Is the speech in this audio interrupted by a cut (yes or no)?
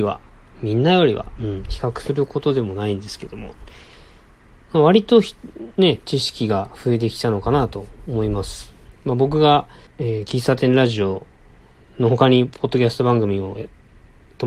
yes